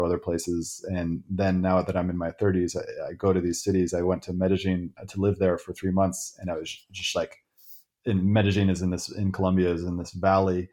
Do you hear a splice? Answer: no; 0 cuts

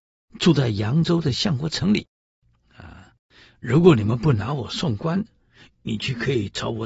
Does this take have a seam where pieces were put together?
no; 0 cuts

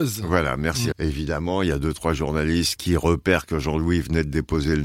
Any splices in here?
yes; 2 cuts; at 0.9 s, 2.8 s

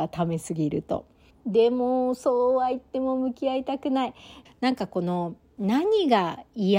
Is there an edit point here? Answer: yes; 2 cuts; at 1.3 s, 4.5 s

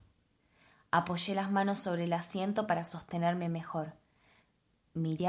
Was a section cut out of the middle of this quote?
no; 0 cuts

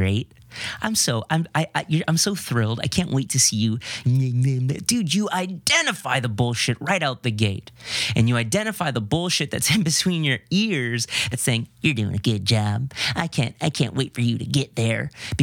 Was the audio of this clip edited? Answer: yes; 2 cuts; at 4.0 s, 11.3 s

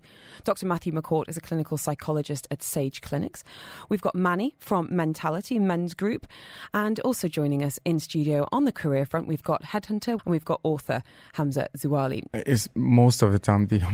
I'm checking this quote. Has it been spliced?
yes; 2 cuts; at 10.2 s, 12.3 s

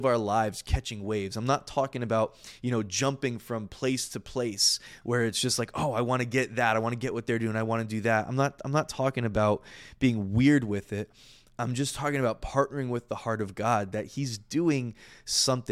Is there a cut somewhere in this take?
no; 0 cuts

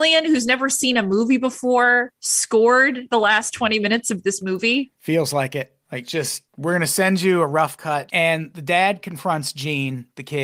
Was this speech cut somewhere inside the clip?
yes; 2 cuts; at 5.8 s, 8.1 s

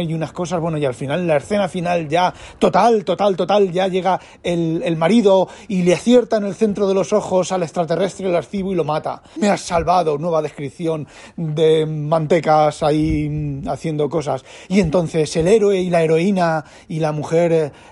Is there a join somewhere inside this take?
yes; 1 cut; at 9.4 s

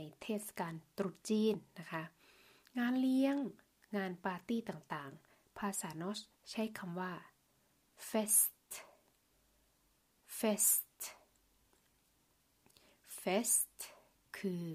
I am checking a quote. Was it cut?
no; 0 cuts

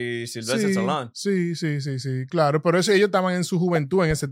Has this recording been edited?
no; 0 cuts

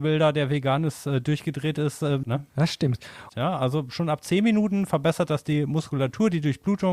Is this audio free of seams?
no; 2 cuts; at 2.2 s, 3.3 s

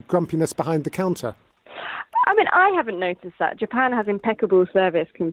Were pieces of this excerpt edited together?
no; 0 cuts

